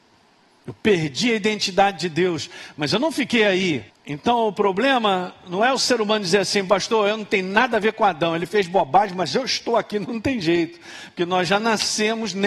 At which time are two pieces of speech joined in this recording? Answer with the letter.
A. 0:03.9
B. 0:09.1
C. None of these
A